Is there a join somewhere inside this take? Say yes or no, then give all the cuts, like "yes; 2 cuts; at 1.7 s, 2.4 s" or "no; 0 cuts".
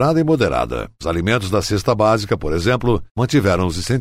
no; 0 cuts